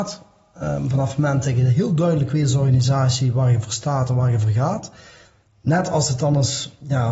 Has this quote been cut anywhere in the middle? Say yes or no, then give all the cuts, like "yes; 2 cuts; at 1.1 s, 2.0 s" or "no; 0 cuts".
no; 0 cuts